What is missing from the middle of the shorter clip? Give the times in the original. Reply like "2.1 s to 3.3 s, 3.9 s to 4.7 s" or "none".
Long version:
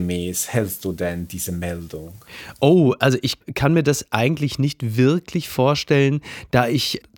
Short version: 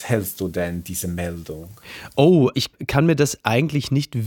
3.0 s to 3.2 s